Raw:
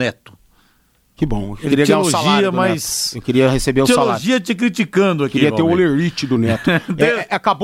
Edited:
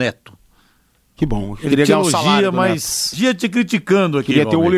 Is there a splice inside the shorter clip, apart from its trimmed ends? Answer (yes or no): yes